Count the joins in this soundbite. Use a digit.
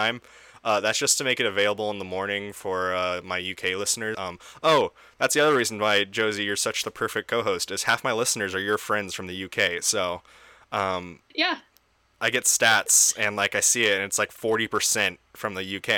1